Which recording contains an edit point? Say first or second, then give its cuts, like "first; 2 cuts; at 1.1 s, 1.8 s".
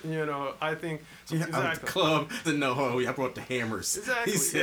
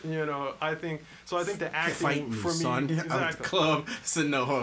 first; 2 cuts; at 1.3 s, 2.4 s